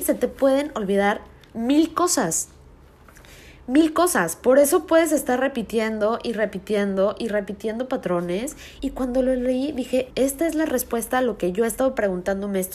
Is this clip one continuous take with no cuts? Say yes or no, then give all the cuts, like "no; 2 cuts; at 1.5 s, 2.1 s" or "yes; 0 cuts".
no; 2 cuts; at 8.8 s, 10.1 s